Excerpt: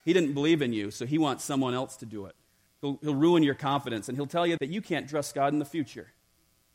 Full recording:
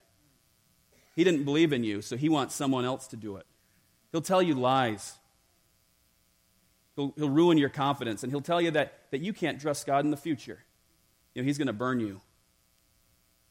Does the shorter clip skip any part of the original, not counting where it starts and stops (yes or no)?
yes